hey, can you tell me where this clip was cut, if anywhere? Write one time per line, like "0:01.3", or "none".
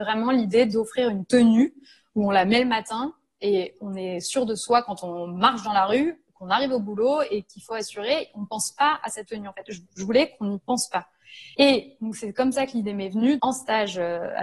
0:11.5
0:13.4